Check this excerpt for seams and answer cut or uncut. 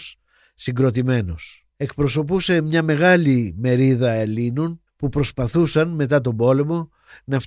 cut